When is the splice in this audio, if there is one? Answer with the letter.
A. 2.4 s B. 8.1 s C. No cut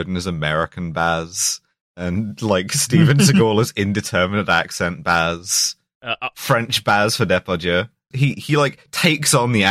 B